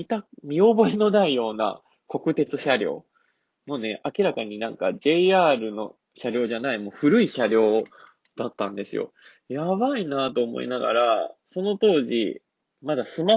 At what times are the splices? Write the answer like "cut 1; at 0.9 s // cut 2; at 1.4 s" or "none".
none